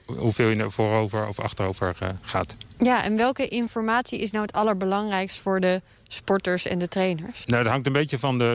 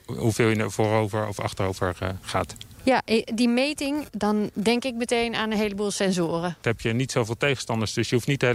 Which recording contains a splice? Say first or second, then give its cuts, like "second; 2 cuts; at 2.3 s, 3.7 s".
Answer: second; 3 cuts; at 2.7 s, 4.1 s, 6.6 s